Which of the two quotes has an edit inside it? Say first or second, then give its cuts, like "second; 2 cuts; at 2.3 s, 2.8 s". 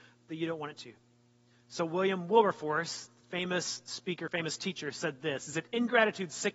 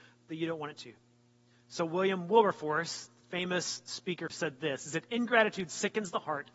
second; 1 cut; at 4.3 s